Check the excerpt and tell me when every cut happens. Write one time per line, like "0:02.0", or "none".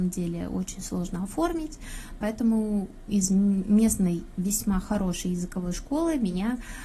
0:02.2